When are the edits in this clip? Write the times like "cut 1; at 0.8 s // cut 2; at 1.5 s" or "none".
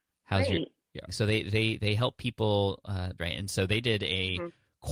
cut 1; at 1.1 s // cut 2; at 3.2 s